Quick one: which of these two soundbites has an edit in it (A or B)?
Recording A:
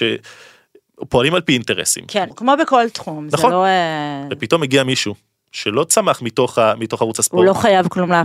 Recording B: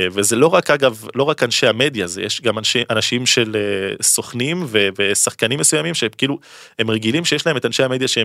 A